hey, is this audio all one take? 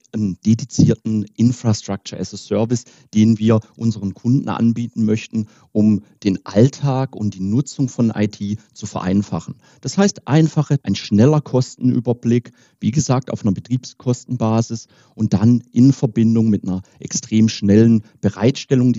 no; 1 cut; at 10.8 s

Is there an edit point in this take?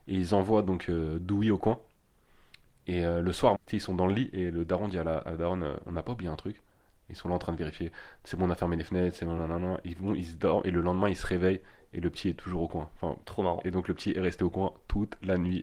yes; 3 cuts; at 3.5 s, 9.4 s, 13.2 s

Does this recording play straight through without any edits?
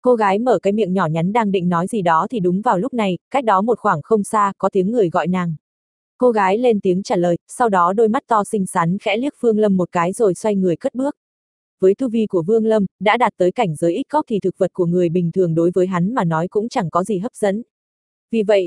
yes; 0 cuts

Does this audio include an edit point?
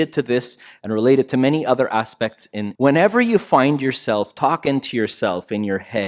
yes; 1 cut; at 2.8 s

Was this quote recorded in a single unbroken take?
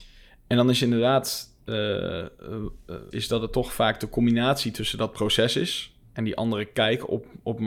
no; 1 cut; at 3.1 s

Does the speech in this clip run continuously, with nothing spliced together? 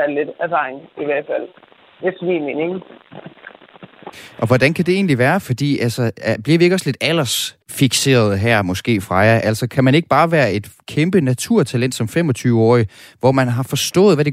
no; 1 cut; at 7.6 s

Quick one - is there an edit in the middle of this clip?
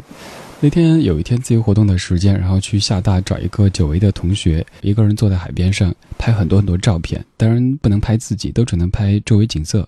yes; 1 cut; at 4.8 s

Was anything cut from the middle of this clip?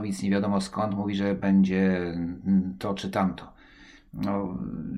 no; 0 cuts

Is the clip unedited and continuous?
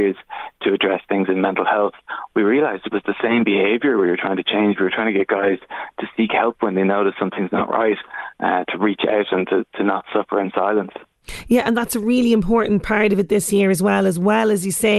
yes; 0 cuts

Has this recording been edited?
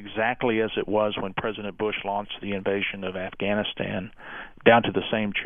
no; 0 cuts

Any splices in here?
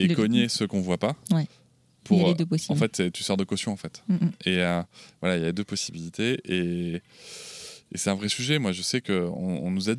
no; 0 cuts

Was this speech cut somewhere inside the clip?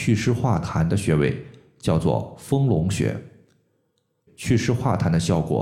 yes; 1 cut; at 4.3 s

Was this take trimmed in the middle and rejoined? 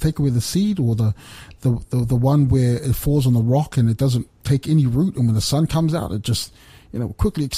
no; 0 cuts

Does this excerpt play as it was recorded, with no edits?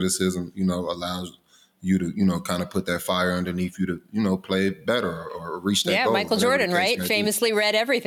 yes; 0 cuts

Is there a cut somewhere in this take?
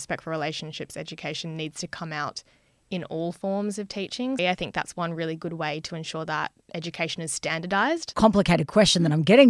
yes; 2 cuts; at 4.4 s, 8.1 s

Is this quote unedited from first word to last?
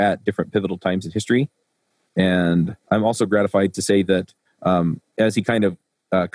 no; 1 cut; at 2.8 s

